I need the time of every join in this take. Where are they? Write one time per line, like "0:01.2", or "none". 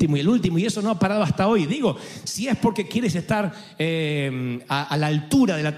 none